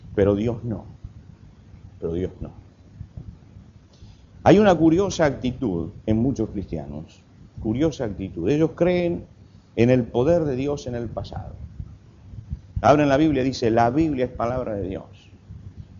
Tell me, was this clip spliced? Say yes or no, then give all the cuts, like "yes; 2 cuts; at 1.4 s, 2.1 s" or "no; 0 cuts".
no; 0 cuts